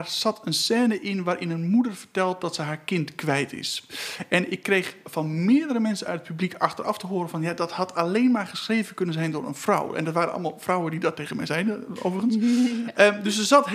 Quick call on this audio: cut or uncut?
uncut